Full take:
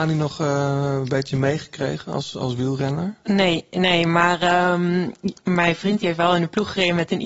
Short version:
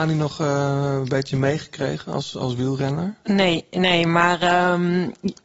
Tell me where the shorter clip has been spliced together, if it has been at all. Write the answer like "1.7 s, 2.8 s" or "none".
none